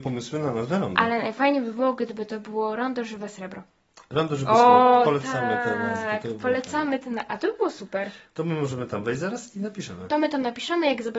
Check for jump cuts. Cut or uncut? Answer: uncut